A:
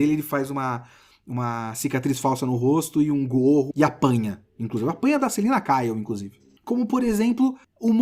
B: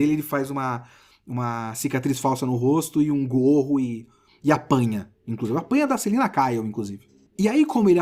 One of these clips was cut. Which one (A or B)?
A